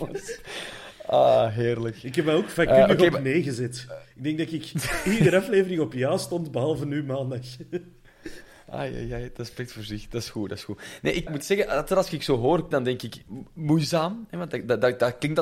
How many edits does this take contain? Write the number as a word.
two